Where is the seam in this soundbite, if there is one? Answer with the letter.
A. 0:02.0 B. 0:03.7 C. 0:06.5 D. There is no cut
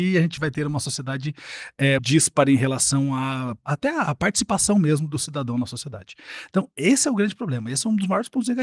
A